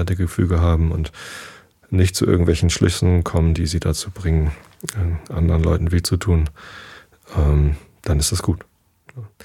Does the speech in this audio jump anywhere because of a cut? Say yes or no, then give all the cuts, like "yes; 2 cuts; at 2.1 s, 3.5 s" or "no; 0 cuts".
no; 0 cuts